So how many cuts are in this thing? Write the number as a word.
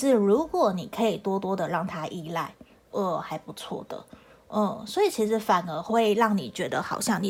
one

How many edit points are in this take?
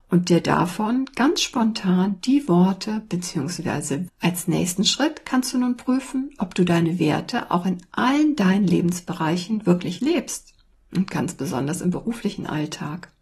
one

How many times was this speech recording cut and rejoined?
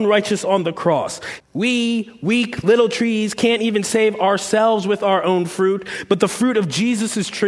one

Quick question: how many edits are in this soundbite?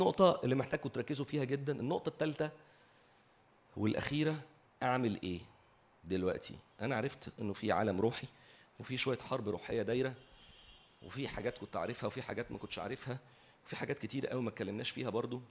zero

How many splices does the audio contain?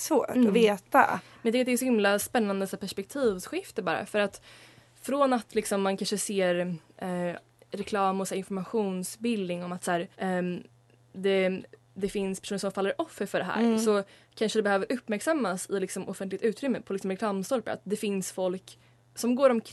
one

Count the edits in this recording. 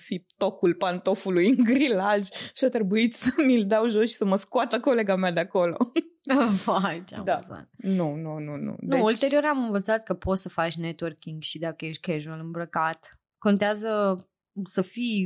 zero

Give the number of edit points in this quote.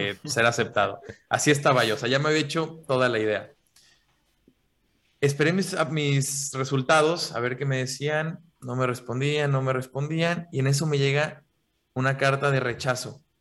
zero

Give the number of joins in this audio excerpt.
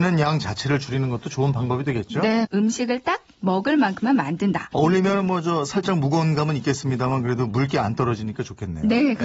two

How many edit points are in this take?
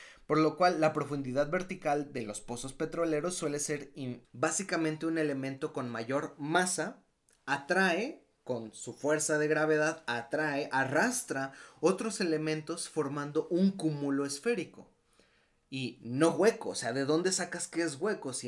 one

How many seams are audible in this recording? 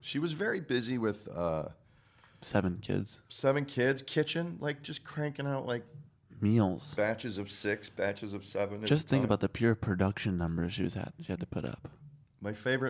zero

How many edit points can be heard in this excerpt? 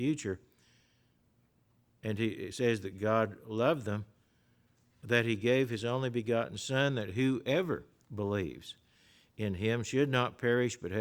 zero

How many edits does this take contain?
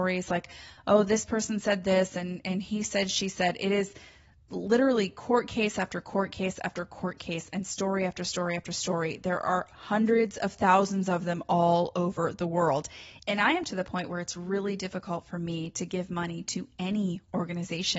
one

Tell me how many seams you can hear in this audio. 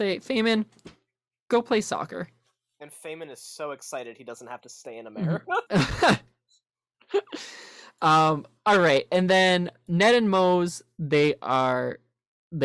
one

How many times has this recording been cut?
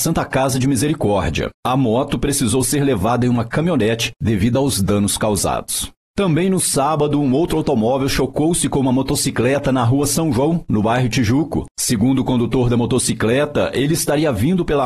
one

